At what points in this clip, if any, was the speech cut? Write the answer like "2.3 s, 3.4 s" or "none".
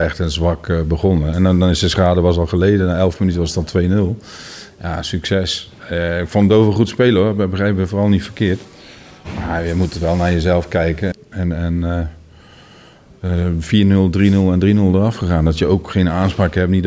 11.1 s